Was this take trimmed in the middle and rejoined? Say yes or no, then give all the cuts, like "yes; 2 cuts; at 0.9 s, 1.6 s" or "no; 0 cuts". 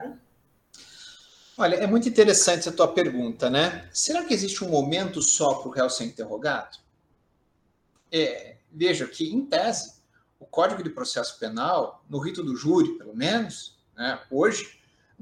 no; 0 cuts